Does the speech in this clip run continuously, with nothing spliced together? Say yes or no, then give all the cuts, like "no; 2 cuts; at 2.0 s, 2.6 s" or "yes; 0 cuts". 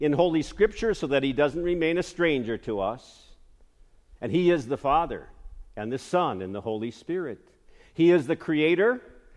yes; 0 cuts